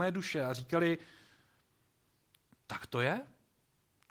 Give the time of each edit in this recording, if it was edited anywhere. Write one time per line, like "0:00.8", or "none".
none